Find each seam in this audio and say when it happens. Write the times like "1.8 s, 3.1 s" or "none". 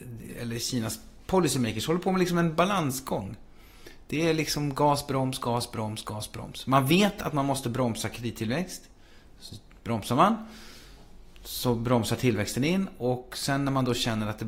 none